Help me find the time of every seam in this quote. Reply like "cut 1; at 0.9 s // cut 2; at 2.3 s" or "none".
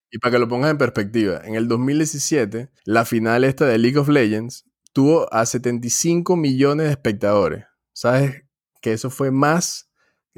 cut 1; at 2.8 s